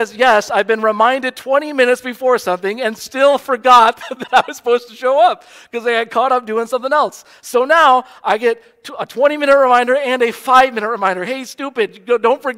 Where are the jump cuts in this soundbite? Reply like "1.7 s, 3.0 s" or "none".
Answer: none